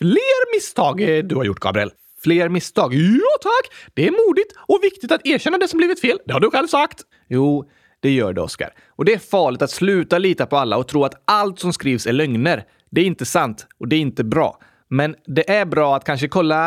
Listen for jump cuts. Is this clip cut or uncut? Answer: cut